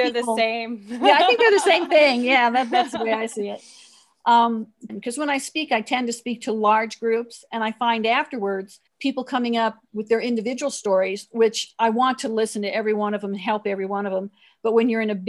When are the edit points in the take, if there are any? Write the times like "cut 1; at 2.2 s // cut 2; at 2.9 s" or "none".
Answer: cut 1; at 4.9 s // cut 2; at 8.9 s